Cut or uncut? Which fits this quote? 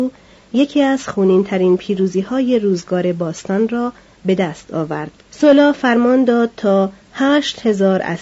cut